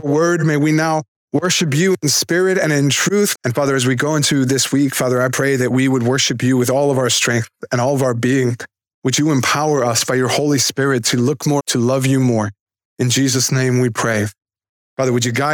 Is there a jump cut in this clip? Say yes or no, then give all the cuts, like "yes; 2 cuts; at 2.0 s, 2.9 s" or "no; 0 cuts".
yes; 2 cuts; at 3.3 s, 11.6 s